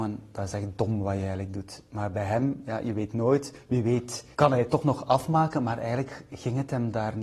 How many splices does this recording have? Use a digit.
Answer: 1